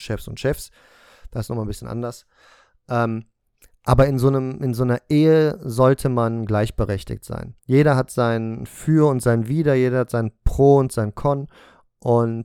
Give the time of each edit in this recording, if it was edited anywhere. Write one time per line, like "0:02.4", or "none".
0:07.6